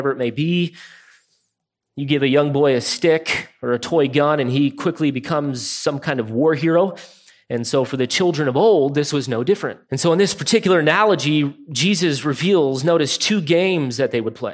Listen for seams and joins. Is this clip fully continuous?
no; 1 cut; at 9.8 s

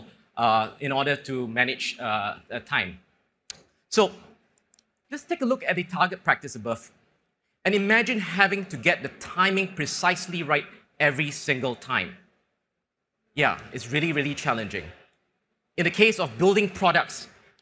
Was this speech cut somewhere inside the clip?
no; 0 cuts

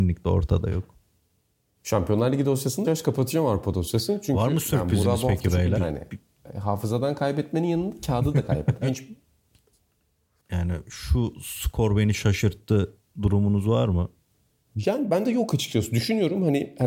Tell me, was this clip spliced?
yes; 3 cuts; at 2.8 s, 5.8 s, 8.8 s

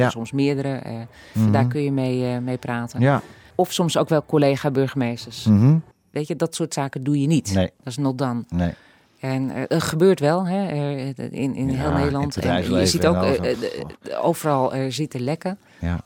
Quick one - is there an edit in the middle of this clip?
yes; 2 cuts; at 1.3 s, 6.1 s

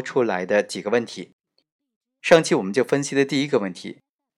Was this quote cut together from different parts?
no; 0 cuts

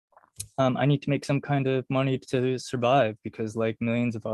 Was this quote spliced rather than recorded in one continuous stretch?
no; 0 cuts

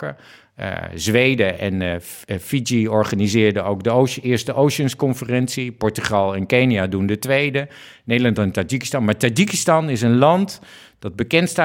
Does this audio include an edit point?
no; 0 cuts

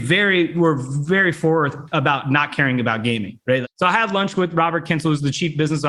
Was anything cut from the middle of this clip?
yes; 1 cut; at 3.6 s

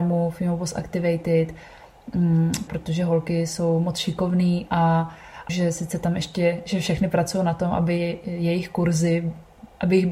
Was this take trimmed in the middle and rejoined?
yes; 2 cuts; at 2.7 s, 5.5 s

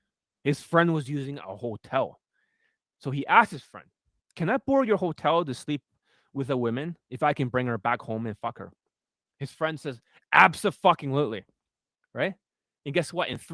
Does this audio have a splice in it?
yes; 1 cut; at 4.2 s

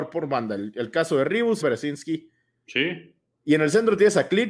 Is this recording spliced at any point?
yes; 1 cut; at 1.6 s

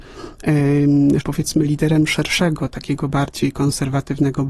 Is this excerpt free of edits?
no; 1 cut; at 1.2 s

